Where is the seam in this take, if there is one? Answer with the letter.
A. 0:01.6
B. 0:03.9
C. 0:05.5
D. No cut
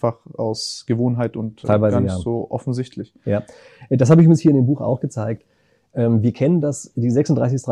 A